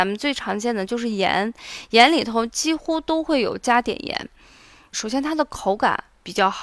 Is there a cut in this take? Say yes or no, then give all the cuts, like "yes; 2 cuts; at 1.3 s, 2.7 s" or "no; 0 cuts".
yes; 1 cut; at 4.9 s